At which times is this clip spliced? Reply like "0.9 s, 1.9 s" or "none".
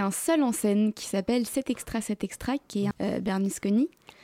2.9 s